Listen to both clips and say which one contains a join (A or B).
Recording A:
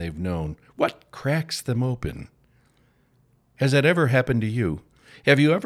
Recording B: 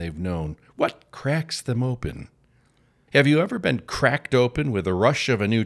B